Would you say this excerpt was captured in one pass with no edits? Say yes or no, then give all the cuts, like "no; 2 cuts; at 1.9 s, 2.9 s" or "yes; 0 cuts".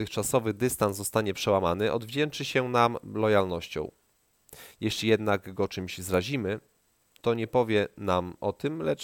yes; 0 cuts